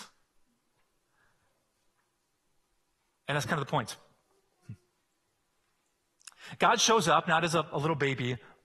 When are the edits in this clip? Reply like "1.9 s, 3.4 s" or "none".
none